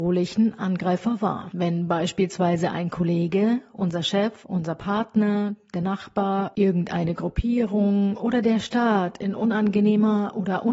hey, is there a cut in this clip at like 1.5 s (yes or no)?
no